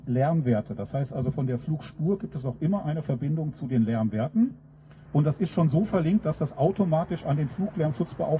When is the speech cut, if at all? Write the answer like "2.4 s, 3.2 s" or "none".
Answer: 5.1 s